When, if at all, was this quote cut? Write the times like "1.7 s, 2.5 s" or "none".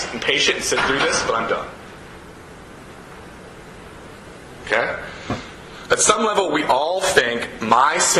none